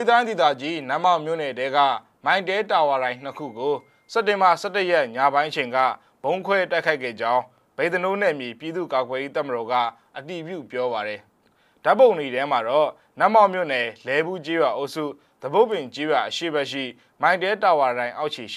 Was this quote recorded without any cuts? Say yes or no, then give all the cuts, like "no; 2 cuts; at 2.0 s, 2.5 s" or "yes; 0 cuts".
no; 1 cut; at 11.3 s